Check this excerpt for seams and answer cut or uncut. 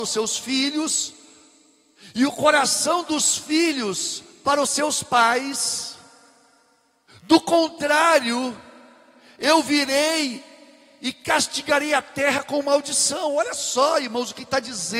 uncut